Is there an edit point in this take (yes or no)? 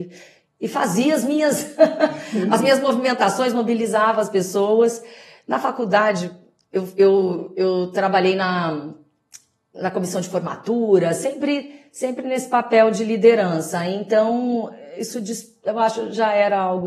no